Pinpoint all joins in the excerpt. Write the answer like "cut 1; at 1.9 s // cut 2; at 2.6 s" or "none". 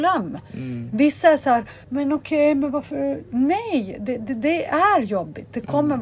cut 1; at 1.8 s